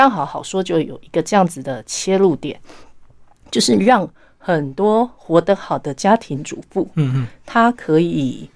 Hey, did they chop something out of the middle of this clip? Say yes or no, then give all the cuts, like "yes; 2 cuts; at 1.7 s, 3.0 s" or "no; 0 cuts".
no; 0 cuts